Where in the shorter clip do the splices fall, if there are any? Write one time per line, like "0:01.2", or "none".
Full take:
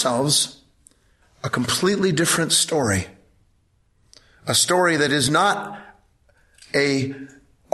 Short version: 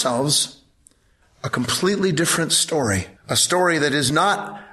0:03.2